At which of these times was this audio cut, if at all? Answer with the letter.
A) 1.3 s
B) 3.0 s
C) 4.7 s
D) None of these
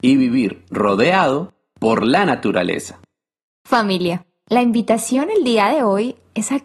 D